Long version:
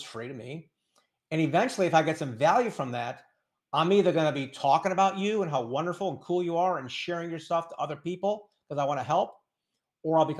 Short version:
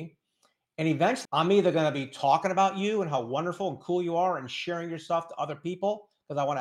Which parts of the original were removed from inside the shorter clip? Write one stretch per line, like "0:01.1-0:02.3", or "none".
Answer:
0:01.8-0:03.7